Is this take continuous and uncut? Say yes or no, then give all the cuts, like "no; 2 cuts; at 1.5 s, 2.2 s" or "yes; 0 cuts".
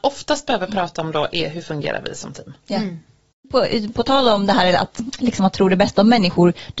yes; 0 cuts